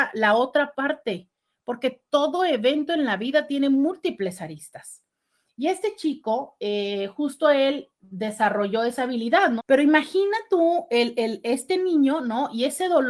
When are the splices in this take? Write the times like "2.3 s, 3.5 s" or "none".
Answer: 9.6 s